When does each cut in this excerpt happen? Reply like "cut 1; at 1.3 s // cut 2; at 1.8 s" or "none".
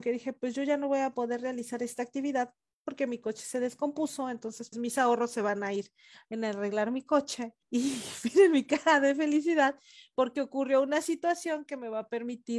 cut 1; at 4.7 s // cut 2; at 7.6 s